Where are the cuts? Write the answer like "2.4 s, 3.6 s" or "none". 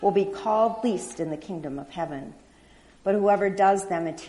none